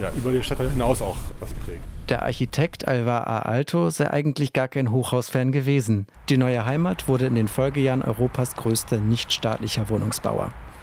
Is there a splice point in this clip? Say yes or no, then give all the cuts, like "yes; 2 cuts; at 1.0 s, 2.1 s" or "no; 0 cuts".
yes; 1 cut; at 6.1 s